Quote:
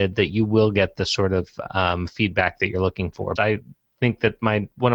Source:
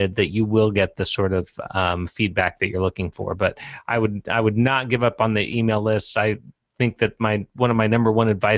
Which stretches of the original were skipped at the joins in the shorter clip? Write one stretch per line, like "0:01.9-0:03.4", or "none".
0:03.4-0:06.1